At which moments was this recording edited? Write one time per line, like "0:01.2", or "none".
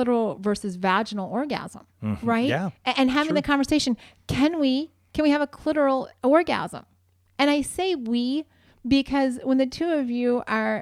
0:01.9